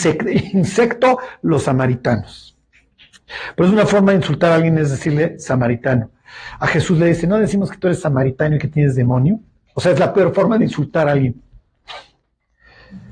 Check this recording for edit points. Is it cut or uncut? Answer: uncut